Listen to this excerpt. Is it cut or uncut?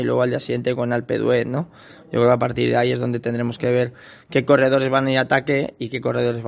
uncut